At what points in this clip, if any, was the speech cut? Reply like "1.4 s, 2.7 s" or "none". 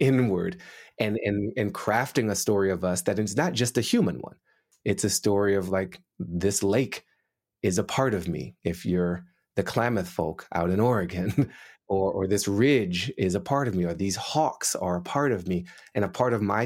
none